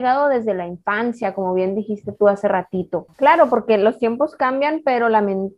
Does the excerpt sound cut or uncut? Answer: cut